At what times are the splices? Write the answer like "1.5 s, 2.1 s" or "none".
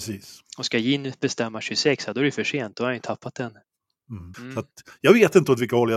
4.3 s